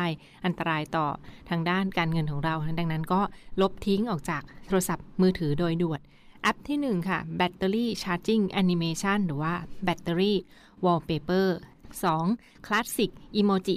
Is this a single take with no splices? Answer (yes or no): yes